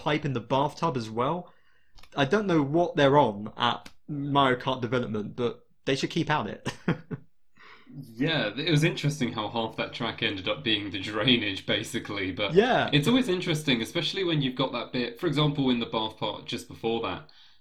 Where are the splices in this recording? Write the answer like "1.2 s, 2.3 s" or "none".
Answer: none